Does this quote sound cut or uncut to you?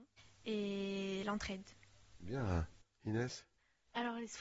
uncut